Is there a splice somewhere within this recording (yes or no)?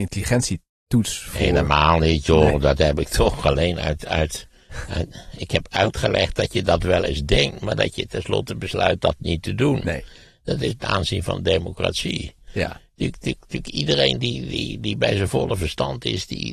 yes